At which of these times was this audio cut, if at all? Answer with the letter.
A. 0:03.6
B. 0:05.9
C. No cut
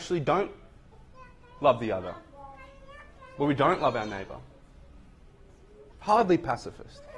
B